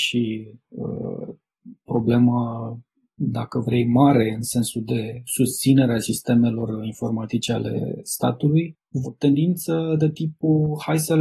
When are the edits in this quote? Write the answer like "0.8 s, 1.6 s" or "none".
9.0 s